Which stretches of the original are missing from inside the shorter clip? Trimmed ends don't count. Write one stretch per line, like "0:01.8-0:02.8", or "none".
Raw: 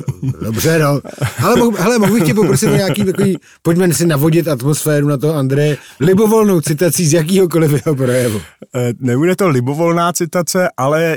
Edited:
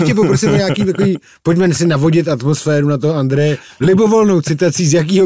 none